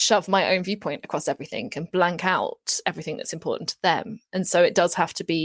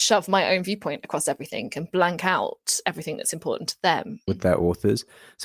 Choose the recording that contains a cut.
second; 1 cut; at 4.3 s

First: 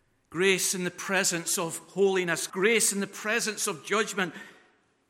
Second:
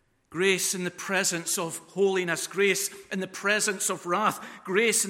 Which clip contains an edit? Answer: first; 1 cut; at 2.5 s

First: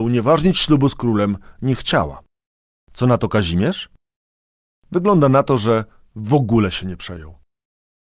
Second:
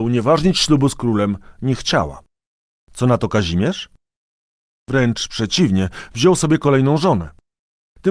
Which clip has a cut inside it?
second; 1 cut; at 4.8 s

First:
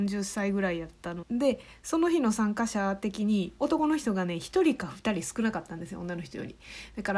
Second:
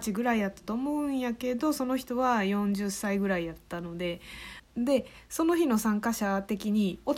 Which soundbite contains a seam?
first; 1 cut; at 1.2 s

